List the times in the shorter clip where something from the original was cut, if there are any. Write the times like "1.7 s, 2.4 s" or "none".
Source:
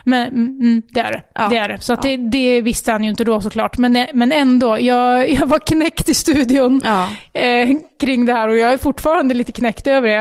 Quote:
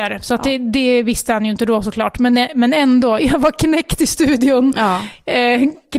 3.2 s